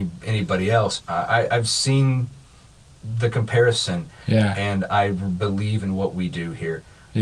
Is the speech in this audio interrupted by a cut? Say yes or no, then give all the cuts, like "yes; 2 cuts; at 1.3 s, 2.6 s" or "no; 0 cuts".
yes; 1 cut; at 1.0 s